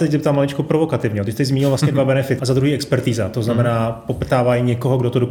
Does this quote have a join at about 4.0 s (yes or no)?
no